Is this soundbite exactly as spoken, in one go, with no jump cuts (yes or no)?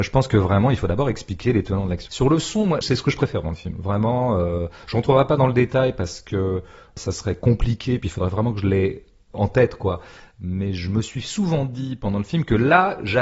no